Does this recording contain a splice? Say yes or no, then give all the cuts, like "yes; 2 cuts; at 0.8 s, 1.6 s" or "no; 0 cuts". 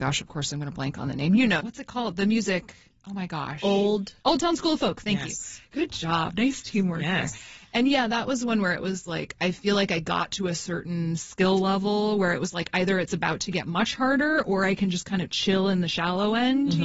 yes; 1 cut; at 1.6 s